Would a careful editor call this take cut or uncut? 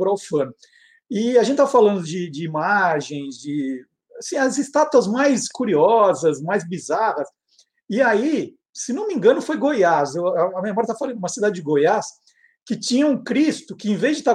uncut